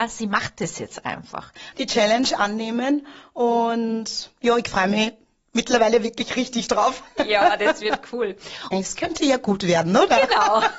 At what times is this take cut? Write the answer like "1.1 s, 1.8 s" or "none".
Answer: 1.7 s, 8.7 s